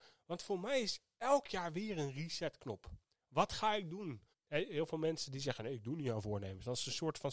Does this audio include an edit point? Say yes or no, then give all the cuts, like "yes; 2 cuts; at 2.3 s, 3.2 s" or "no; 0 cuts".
yes; 1 cut; at 4.3 s